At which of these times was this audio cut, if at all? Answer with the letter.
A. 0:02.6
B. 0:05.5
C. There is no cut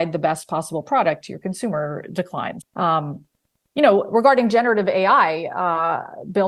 A